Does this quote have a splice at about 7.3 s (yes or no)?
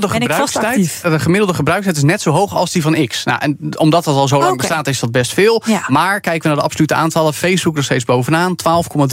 no